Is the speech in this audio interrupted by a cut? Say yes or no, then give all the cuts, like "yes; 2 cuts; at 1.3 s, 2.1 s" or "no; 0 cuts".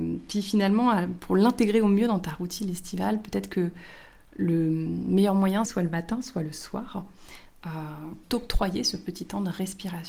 yes; 2 cuts; at 5.7 s, 8.2 s